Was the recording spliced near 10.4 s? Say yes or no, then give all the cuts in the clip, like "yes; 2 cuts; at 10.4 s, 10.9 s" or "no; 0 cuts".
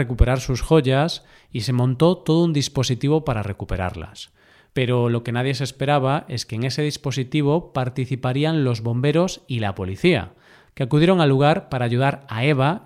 no; 0 cuts